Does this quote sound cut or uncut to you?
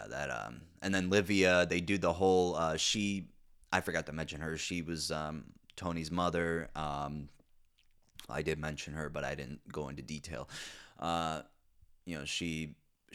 uncut